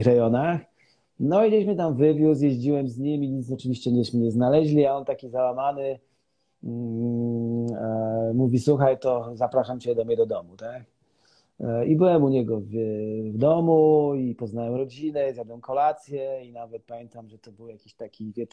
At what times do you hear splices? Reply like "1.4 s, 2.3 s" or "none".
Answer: none